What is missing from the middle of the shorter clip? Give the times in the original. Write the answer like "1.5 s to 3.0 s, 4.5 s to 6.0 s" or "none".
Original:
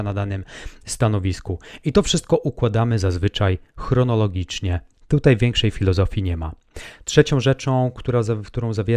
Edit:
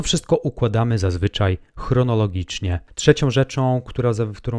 4.9 s to 7.0 s